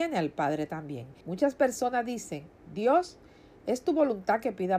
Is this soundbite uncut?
no; 1 cut; at 1.2 s

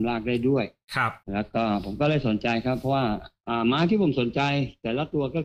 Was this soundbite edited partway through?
yes; 1 cut; at 1.2 s

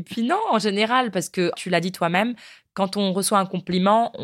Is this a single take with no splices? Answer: no; 1 cut; at 1.5 s

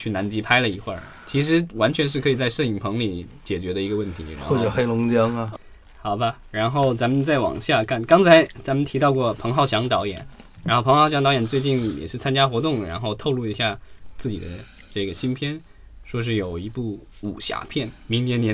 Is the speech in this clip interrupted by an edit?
no; 0 cuts

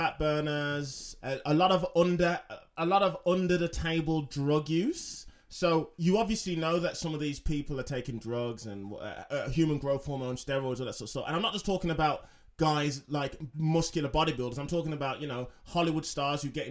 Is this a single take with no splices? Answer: no; 1 cut; at 1.2 s

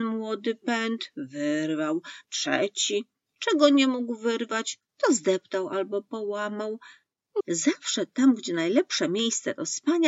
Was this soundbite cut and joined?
yes; 2 cuts; at 2.2 s, 7.4 s

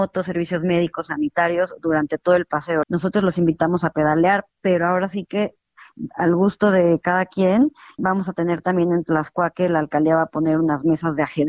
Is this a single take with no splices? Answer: no; 2 cuts; at 2.8 s, 8.0 s

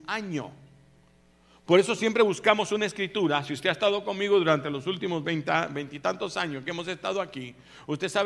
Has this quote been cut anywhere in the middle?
no; 0 cuts

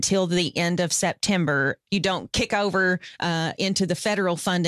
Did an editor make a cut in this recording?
yes; 1 cut; at 1.9 s

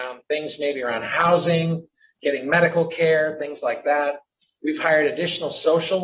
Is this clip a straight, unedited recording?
yes; 0 cuts

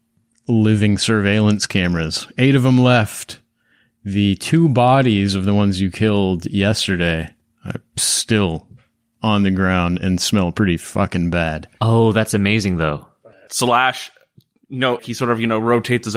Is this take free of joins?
no; 2 cuts; at 13.5 s, 15.0 s

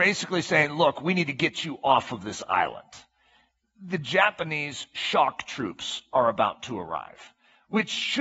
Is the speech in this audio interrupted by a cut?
no; 0 cuts

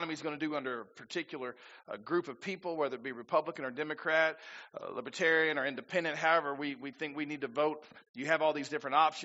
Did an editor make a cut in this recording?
no; 0 cuts

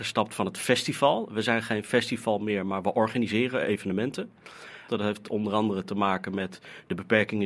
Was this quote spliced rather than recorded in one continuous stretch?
yes; 1 cut; at 4.9 s

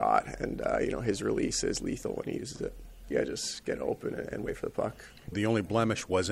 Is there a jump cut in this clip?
yes; 2 cuts; at 3.1 s, 5.3 s

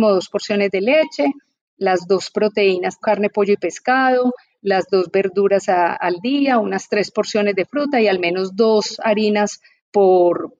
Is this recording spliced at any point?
yes; 1 cut; at 3.0 s

